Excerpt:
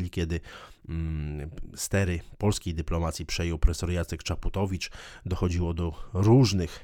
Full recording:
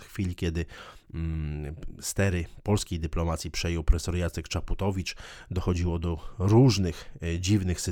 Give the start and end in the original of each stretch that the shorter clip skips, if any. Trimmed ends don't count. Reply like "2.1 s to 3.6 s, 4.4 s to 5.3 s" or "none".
none